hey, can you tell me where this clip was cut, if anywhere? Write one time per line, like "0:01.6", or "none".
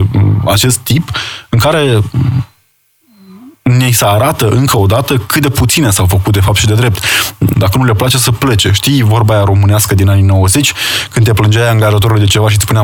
0:07.5

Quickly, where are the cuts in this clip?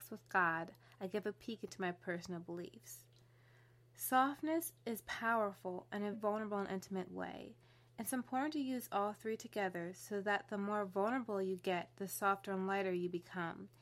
0:06.1

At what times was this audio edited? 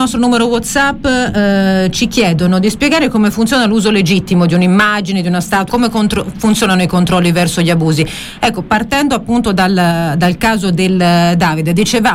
0:05.7

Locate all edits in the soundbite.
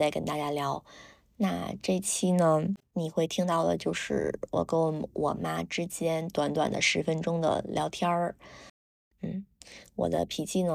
0:09.1

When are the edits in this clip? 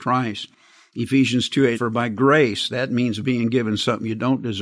0:01.7

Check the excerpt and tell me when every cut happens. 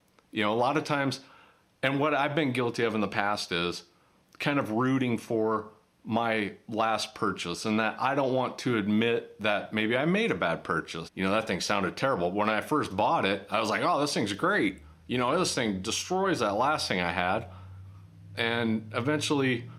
0:11.1

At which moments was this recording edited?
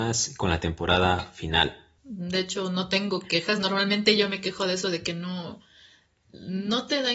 0:02.0

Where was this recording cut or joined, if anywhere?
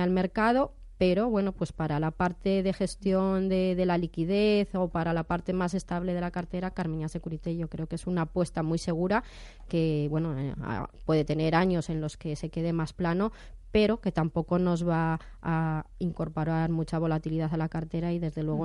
none

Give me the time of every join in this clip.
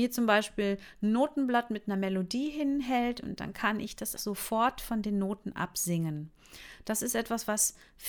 0:04.2

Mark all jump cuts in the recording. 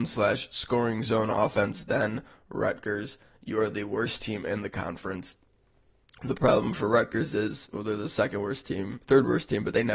none

